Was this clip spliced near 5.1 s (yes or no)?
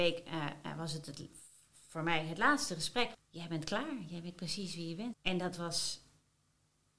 yes